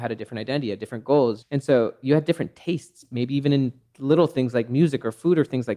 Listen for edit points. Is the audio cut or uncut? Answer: cut